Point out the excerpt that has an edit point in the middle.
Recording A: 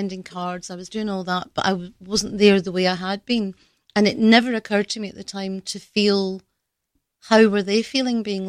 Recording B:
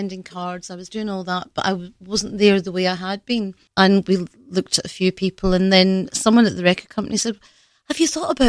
B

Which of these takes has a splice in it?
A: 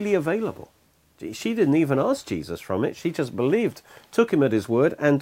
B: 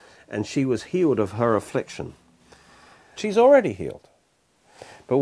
B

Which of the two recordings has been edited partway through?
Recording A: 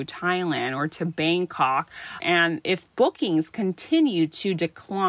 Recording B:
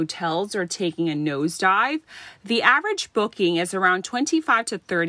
A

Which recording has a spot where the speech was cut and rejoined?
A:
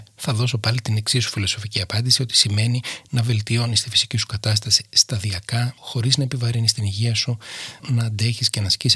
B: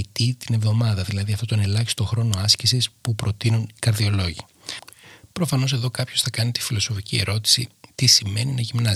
A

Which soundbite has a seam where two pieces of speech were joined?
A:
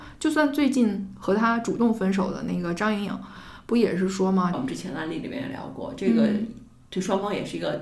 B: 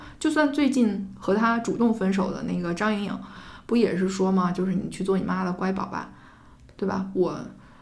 A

